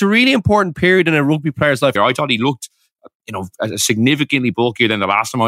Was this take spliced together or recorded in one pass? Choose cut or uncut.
cut